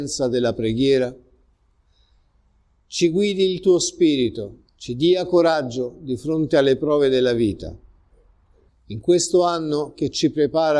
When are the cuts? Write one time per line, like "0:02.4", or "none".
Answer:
0:04.7
0:08.7

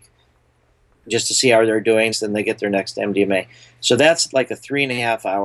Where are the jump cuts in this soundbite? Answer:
0:02.1

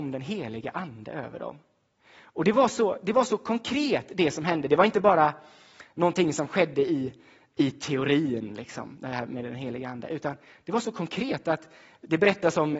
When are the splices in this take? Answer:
none

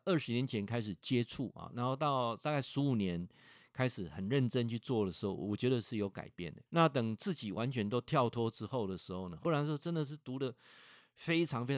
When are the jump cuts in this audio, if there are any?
0:06.7
0:09.4

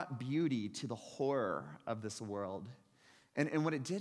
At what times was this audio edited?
none

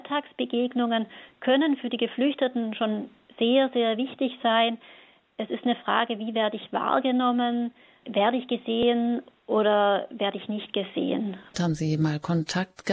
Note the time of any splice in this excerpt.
0:08.0
0:11.5

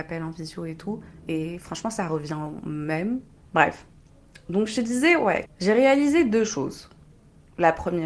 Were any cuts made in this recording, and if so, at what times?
0:03.5
0:05.5

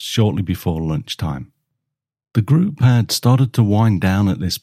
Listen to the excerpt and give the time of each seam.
none

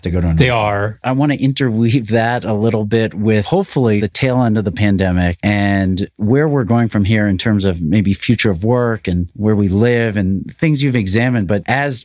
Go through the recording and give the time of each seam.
0:01.0

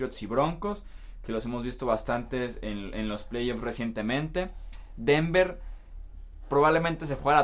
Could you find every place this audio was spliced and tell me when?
none

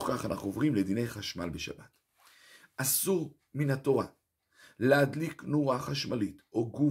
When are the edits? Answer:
none

